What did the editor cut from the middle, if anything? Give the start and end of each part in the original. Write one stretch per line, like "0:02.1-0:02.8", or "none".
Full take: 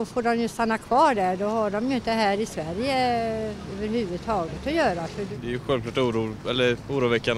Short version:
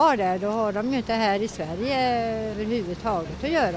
0:03.5-0:03.8